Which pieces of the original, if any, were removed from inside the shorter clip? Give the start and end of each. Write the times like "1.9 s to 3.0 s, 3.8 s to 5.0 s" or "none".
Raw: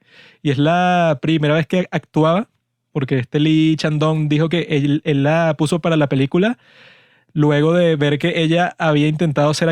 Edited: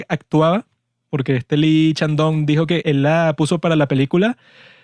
4.6 s to 5.0 s